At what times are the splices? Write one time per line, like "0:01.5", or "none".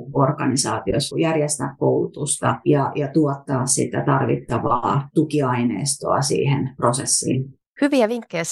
none